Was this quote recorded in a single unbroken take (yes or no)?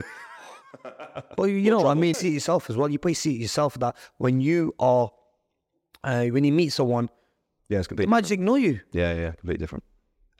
no